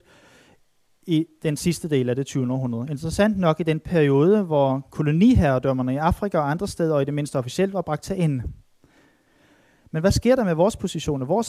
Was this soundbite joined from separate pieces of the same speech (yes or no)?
no